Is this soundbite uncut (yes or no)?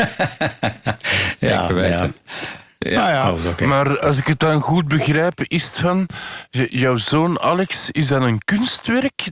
yes